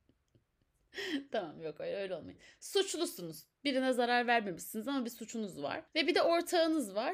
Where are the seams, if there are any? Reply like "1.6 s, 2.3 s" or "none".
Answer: none